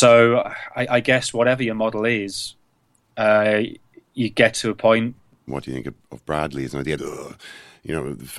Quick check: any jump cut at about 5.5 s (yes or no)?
yes